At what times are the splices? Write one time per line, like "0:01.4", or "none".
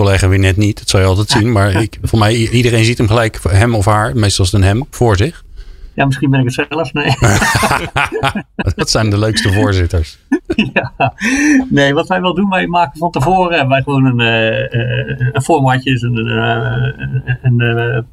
none